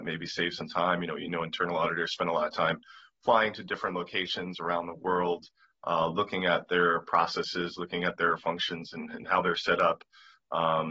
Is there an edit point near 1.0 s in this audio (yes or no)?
no